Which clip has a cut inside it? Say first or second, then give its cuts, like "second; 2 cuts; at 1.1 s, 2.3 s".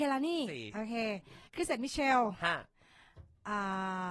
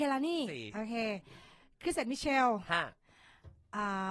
first; 1 cut; at 1.5 s